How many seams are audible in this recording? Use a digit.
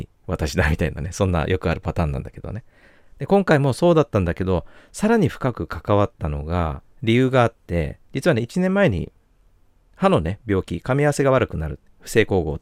1